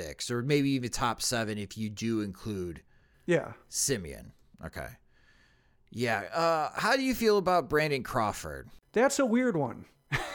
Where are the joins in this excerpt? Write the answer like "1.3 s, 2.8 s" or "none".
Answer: none